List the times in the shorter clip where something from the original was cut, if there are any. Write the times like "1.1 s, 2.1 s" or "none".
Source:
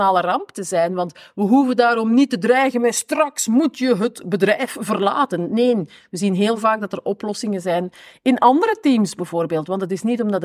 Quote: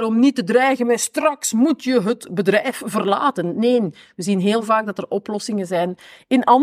none